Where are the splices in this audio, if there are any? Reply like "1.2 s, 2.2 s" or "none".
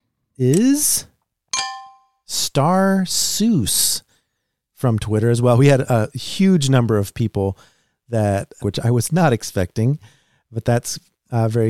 8.6 s